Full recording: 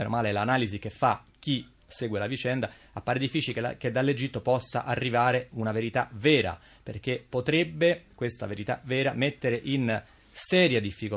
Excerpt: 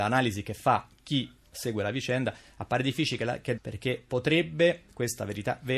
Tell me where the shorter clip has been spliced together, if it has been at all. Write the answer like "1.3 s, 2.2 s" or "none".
3.6 s